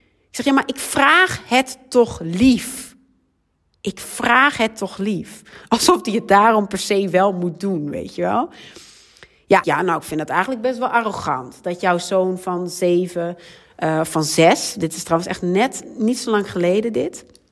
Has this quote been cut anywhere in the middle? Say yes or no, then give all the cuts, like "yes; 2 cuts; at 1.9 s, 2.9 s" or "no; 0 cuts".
yes; 1 cut; at 9.6 s